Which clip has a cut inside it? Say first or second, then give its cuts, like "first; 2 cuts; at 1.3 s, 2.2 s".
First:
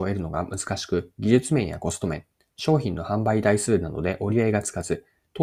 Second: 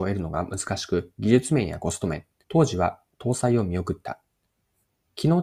second; 1 cut; at 2.4 s